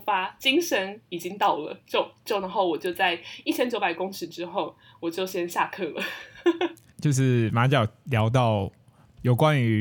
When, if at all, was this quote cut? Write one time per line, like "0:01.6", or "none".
none